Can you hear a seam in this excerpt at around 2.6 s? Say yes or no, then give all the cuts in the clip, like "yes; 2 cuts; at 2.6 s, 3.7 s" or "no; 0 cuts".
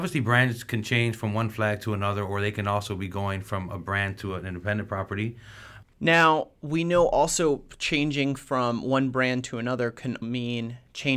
no; 2 cuts; at 5.8 s, 10.2 s